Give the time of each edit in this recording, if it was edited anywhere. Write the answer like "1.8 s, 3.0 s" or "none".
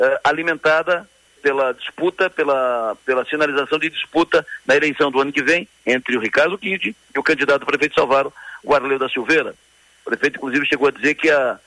1.4 s